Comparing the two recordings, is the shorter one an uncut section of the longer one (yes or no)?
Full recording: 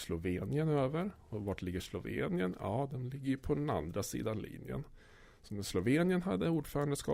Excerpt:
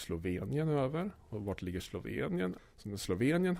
no